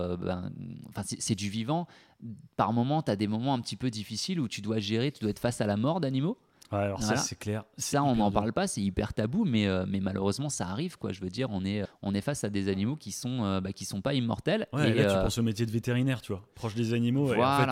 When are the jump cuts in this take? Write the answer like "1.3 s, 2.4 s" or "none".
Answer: 11.9 s